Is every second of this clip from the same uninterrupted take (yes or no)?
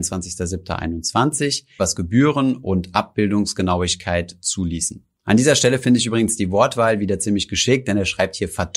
no